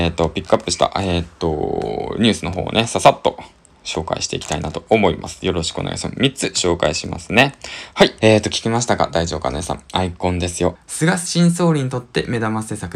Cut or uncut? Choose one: cut